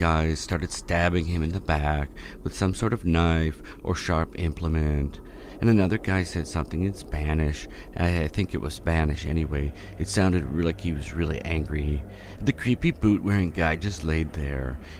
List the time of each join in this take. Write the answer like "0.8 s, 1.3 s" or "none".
12.4 s